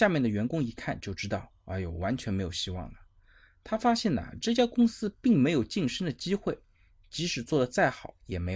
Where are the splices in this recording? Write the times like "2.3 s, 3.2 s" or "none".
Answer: none